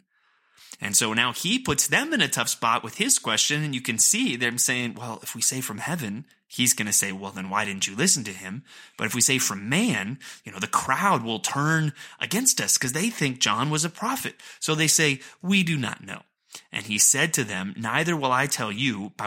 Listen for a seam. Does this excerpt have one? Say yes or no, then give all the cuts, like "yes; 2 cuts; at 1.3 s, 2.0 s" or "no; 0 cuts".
no; 0 cuts